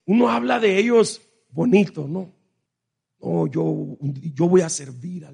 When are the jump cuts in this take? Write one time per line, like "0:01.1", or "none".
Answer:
none